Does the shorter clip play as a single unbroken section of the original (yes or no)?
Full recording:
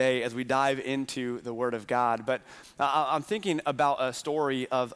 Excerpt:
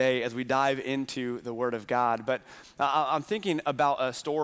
yes